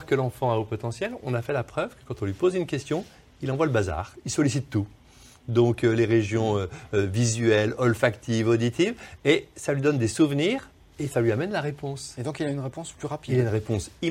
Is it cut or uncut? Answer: uncut